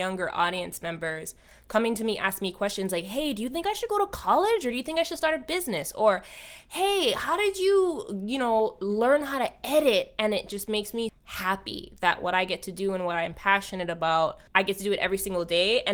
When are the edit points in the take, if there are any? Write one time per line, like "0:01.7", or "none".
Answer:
0:11.1
0:14.5